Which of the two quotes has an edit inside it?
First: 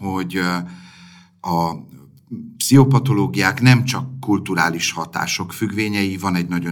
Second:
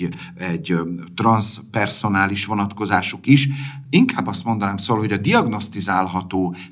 second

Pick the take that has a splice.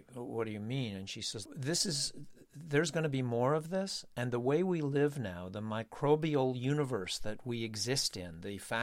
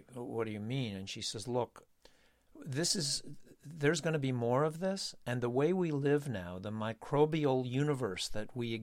first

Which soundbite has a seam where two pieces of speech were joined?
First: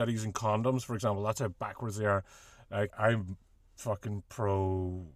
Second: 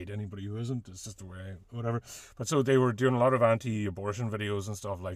first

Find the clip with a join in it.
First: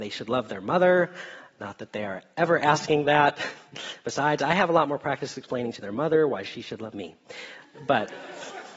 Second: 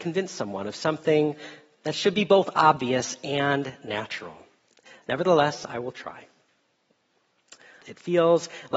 second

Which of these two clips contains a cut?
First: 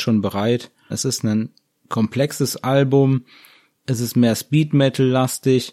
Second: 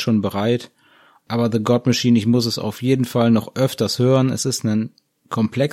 first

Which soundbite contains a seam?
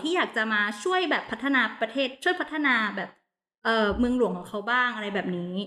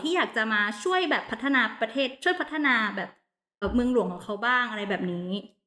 second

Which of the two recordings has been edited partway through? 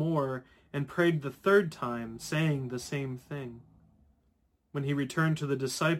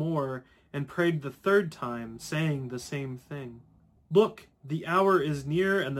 second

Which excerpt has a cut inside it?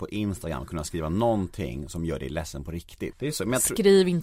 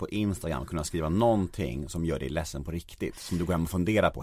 first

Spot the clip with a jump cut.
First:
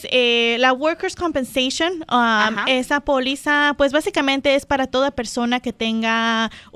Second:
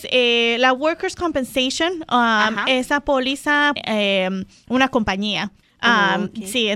second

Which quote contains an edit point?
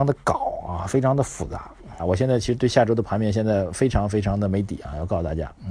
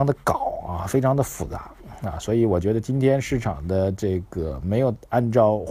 first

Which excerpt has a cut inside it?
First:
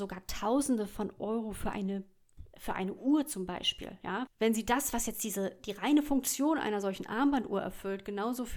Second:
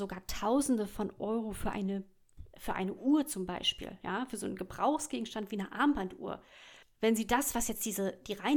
first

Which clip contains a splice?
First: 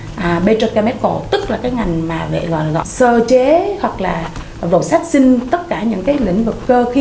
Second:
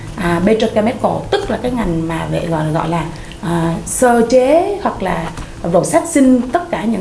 first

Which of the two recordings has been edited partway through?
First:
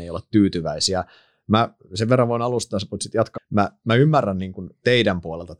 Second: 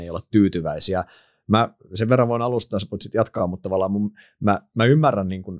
first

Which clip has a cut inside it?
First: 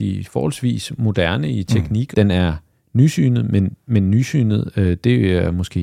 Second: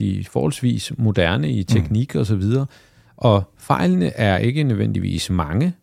first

